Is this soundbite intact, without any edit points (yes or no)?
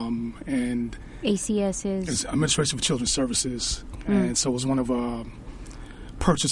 yes